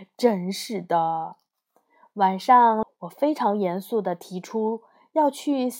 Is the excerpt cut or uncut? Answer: cut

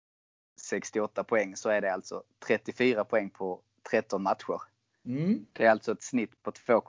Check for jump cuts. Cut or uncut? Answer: uncut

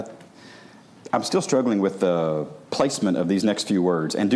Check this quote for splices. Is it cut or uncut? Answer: cut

